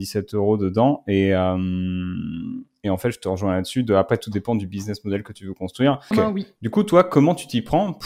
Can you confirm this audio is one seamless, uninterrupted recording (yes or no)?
no